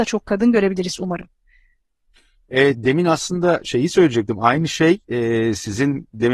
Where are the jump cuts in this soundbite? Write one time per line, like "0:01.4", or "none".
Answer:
none